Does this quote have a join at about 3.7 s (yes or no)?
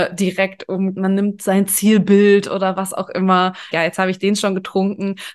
yes